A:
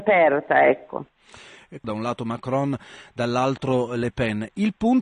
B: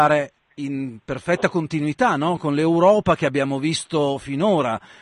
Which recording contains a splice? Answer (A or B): A